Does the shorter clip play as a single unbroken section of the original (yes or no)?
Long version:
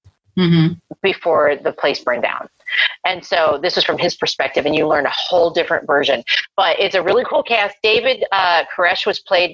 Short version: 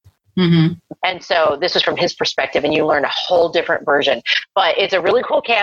no